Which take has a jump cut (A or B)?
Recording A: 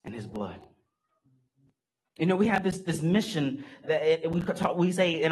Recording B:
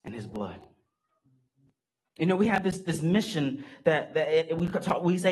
A